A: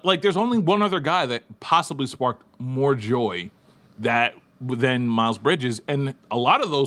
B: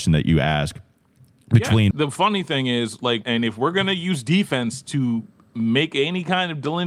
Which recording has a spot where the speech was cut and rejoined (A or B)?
B